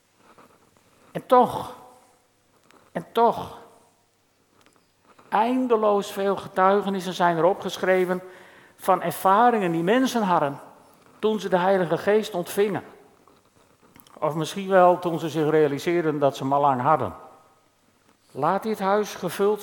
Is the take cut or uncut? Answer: cut